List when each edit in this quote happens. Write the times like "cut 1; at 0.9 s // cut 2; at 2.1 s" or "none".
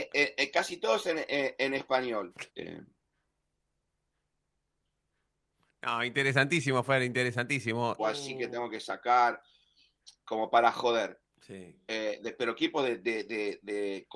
cut 1; at 2.5 s // cut 2; at 8.0 s